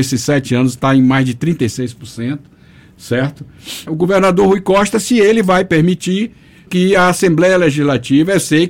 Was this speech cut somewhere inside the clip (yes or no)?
yes